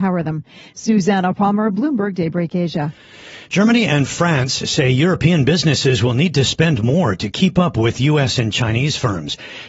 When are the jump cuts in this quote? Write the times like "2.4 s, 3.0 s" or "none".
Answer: none